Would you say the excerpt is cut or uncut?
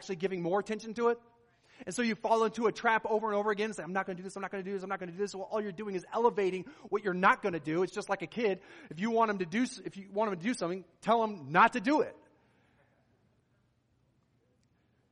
uncut